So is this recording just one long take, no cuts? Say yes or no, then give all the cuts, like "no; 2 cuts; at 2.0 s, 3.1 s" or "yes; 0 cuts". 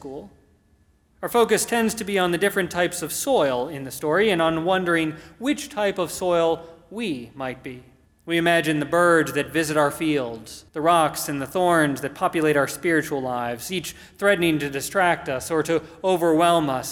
no; 2 cuts; at 8.1 s, 10.7 s